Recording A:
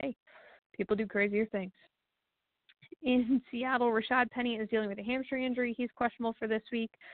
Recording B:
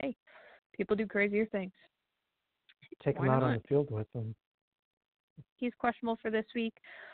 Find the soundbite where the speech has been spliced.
B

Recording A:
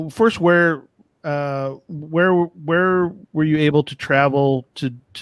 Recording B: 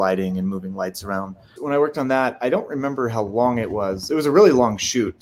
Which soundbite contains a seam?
B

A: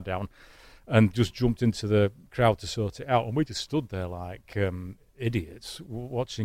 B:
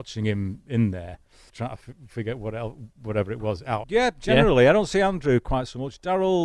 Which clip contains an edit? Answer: B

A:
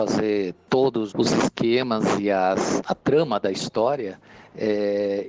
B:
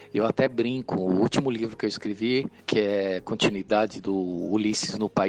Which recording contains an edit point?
A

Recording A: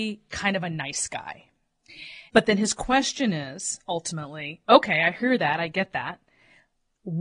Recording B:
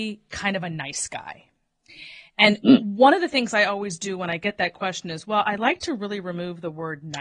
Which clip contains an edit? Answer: A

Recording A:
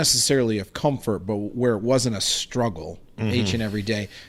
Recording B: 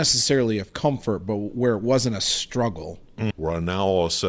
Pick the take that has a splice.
B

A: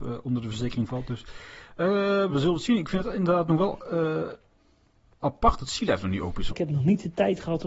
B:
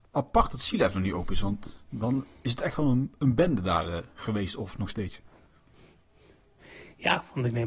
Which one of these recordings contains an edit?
A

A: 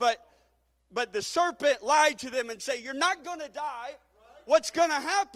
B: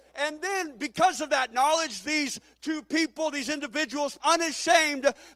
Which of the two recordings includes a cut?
B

